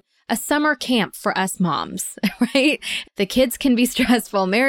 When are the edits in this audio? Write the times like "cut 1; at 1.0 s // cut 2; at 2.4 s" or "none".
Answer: cut 1; at 3.0 s